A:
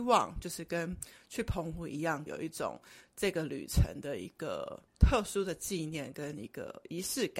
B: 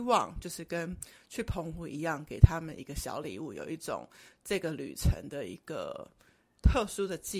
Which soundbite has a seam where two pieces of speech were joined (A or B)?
A